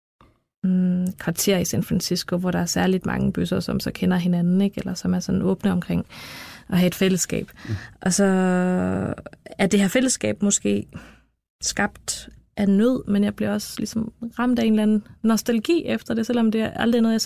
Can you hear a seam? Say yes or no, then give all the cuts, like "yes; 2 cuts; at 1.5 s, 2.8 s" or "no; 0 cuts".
no; 0 cuts